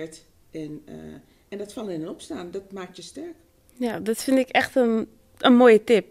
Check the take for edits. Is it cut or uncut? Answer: uncut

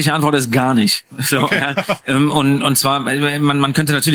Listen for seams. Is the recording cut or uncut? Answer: uncut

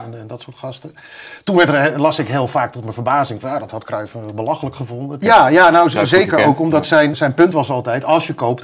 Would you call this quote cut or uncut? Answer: cut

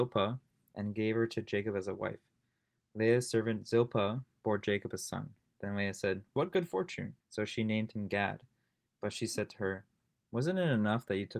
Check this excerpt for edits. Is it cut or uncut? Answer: cut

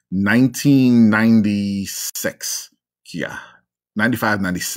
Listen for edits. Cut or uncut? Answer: uncut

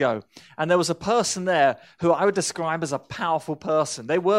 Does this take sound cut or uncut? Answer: uncut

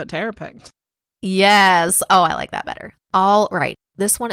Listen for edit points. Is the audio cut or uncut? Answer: cut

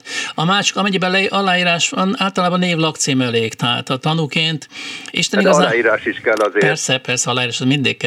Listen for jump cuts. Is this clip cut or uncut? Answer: uncut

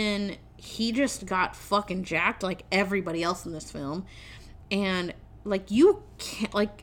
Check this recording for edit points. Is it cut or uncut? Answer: uncut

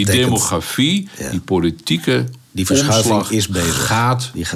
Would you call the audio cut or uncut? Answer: uncut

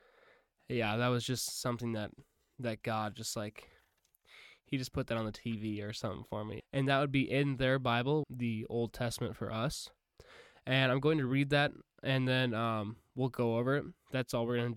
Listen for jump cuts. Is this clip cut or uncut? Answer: cut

